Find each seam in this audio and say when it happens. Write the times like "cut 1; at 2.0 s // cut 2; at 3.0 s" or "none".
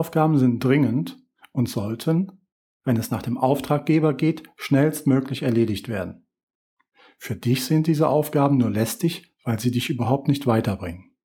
none